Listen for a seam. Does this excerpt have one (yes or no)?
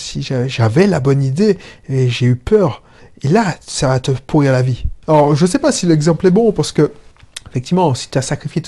yes